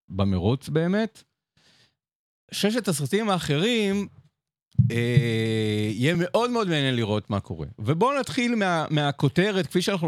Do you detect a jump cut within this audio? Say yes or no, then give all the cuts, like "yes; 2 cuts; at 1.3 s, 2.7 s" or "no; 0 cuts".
no; 0 cuts